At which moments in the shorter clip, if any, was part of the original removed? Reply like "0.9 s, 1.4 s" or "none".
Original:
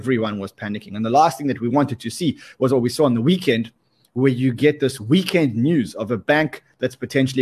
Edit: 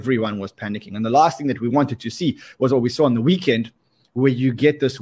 none